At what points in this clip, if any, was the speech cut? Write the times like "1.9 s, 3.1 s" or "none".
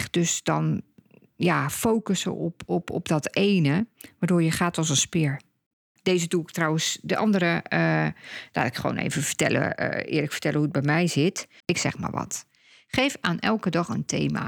6.0 s, 11.6 s